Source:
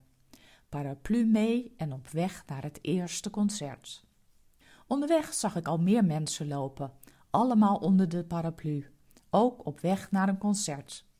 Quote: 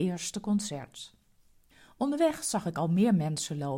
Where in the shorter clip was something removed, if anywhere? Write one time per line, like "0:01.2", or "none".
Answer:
none